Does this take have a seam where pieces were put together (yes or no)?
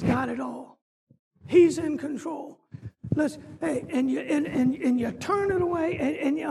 no